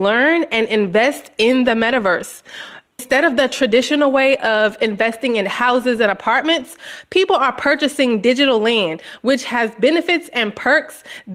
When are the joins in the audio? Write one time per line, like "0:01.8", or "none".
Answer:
0:02.9